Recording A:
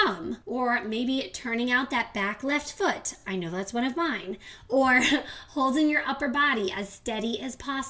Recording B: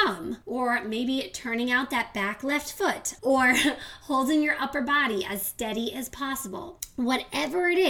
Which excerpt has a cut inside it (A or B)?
B